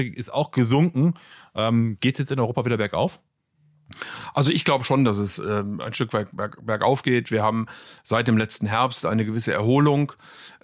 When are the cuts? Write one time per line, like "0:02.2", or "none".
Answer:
none